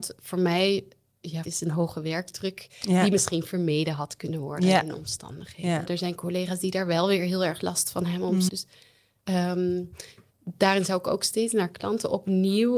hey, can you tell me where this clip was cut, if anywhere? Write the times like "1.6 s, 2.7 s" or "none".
1.4 s, 5.9 s, 8.5 s